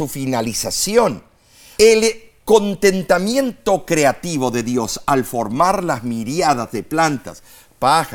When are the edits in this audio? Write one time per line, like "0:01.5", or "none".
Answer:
0:01.8